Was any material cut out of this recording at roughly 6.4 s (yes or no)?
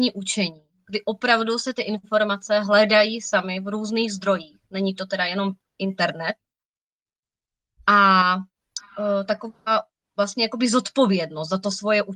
no